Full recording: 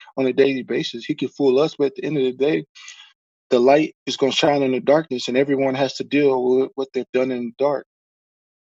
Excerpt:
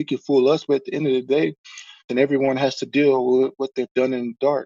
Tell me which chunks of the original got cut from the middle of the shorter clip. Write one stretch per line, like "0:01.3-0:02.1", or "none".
0:03.2-0:05.3